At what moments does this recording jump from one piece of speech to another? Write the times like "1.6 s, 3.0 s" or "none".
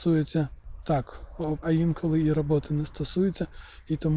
1.6 s